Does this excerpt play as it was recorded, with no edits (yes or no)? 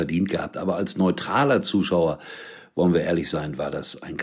yes